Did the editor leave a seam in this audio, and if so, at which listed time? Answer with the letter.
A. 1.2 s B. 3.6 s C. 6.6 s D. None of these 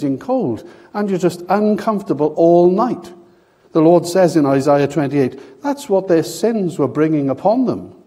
B